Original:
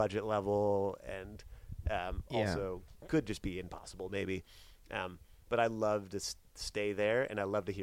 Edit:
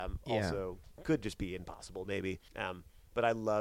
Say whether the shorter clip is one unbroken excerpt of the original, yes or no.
no